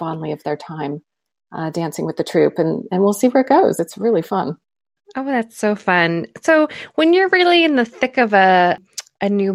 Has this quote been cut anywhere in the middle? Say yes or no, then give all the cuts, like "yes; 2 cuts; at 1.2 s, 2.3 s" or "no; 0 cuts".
no; 0 cuts